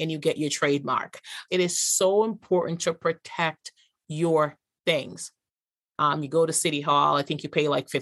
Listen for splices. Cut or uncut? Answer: cut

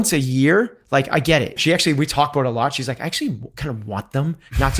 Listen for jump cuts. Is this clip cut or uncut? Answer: cut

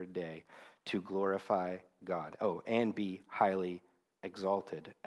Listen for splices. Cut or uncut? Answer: uncut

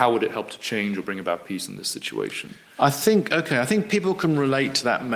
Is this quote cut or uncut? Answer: uncut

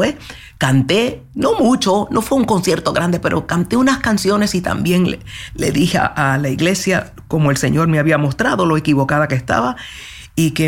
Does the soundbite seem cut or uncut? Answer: uncut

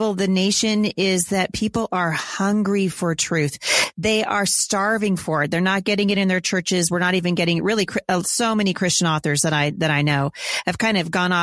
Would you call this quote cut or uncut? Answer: uncut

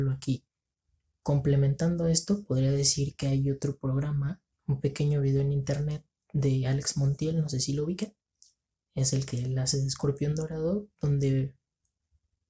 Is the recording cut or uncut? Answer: uncut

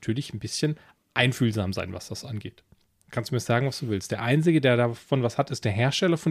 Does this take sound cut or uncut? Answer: cut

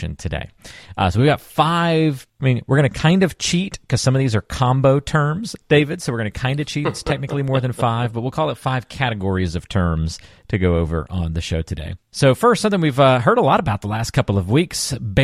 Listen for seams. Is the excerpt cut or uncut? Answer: uncut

